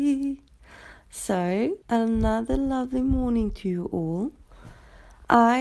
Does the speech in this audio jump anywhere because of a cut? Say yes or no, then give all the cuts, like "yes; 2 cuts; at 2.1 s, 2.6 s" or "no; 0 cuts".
yes; 1 cut; at 1.8 s